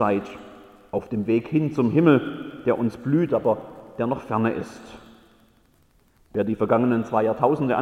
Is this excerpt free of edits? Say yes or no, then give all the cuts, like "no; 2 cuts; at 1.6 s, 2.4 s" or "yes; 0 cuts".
no; 1 cut; at 6.2 s